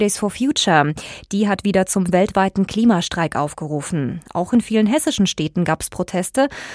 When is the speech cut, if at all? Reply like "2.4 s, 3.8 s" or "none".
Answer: none